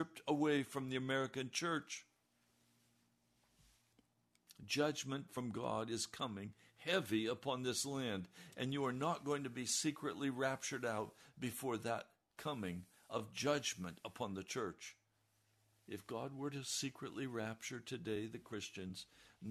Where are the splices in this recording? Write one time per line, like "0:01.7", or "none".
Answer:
none